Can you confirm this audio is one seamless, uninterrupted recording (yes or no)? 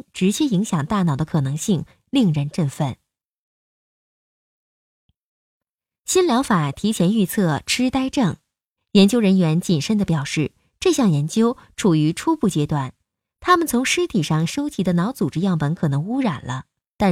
no